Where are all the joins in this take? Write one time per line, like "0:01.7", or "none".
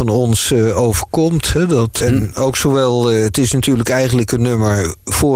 0:02.0